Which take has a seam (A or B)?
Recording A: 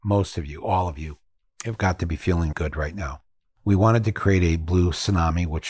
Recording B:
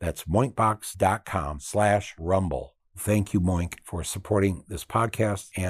A